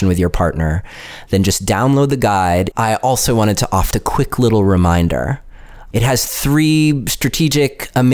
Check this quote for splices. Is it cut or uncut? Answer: cut